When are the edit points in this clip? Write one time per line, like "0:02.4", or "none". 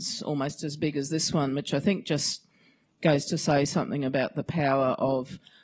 none